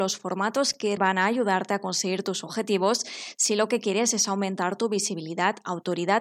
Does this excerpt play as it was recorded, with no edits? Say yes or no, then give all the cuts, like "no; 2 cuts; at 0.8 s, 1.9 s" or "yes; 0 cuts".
no; 1 cut; at 1.0 s